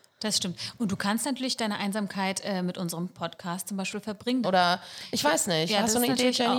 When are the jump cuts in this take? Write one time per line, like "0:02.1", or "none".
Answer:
0:04.4